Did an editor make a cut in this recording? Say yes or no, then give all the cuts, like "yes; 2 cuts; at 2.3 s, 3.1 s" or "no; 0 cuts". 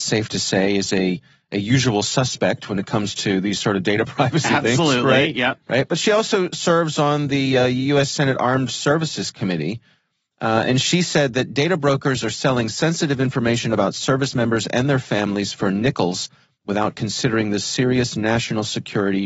no; 0 cuts